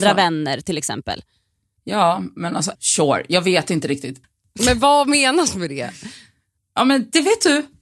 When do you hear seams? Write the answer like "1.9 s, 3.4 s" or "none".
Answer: 2.7 s, 4.2 s